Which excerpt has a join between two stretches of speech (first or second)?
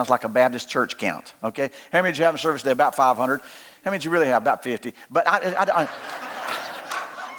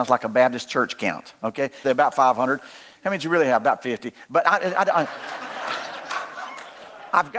second